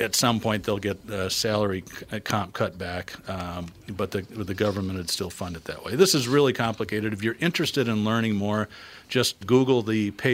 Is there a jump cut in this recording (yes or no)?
yes